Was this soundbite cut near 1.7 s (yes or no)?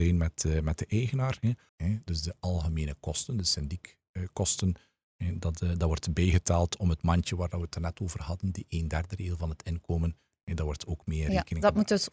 yes